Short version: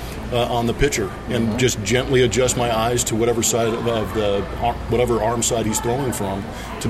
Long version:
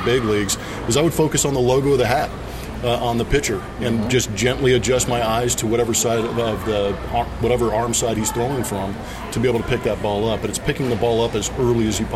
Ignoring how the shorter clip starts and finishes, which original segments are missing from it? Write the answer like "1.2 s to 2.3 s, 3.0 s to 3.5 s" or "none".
none